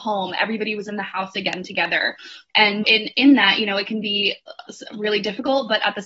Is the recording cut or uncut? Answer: cut